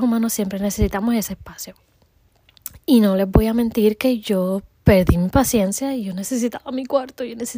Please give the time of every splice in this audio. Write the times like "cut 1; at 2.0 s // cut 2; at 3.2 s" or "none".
none